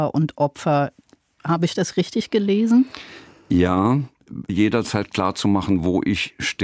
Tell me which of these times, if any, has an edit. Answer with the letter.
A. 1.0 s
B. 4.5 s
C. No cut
B